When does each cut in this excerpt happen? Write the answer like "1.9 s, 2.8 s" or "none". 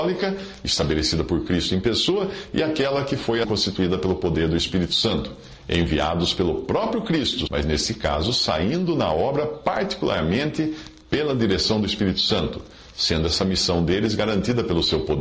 3.4 s, 7.5 s